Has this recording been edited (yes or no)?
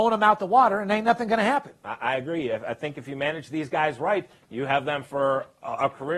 no